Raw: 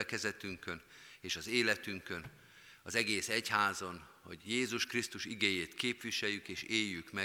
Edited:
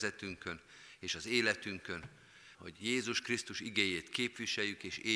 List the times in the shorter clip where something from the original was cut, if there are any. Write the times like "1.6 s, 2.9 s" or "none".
2.5 s